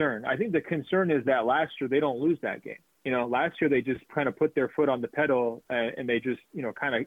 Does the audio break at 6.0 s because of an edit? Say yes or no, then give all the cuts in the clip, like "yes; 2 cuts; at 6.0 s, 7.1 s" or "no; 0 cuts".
no; 0 cuts